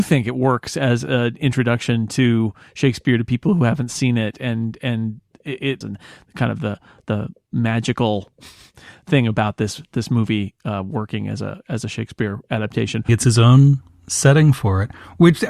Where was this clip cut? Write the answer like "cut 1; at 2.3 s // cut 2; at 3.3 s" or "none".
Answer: cut 1; at 5.8 s // cut 2; at 13.1 s